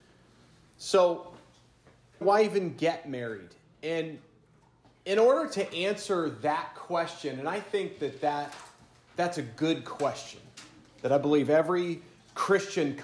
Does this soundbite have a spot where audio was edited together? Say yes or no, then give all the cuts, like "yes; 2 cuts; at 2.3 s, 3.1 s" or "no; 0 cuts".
no; 0 cuts